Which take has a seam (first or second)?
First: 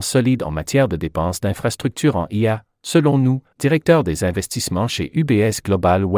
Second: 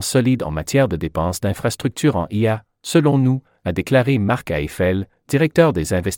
first